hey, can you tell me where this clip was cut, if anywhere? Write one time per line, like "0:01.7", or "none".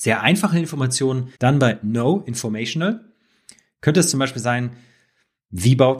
0:01.3